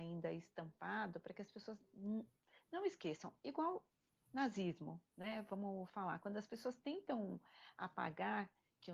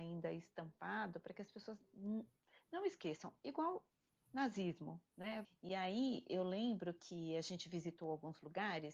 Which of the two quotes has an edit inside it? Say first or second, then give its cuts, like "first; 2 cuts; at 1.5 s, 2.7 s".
second; 1 cut; at 5.4 s